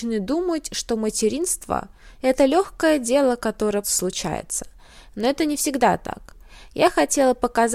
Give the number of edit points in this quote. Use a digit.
1